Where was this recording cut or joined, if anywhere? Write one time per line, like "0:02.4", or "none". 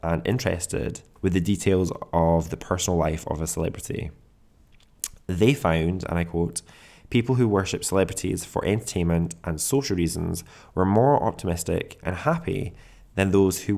0:01.2
0:12.0